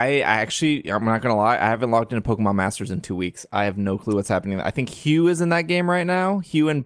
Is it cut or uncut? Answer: uncut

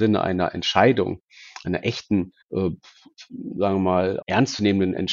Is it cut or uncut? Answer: cut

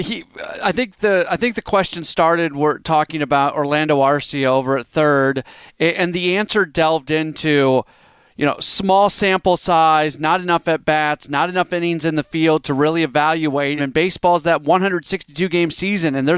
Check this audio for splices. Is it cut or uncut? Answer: cut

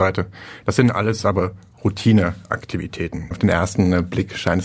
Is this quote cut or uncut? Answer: cut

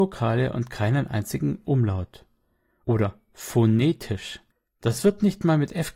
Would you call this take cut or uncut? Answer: uncut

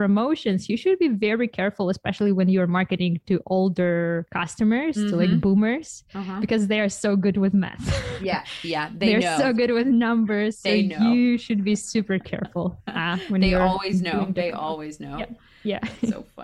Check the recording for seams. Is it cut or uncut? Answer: uncut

